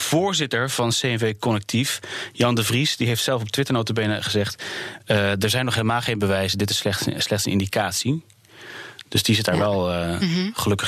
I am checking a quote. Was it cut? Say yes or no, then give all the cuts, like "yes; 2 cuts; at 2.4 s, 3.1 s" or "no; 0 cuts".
no; 0 cuts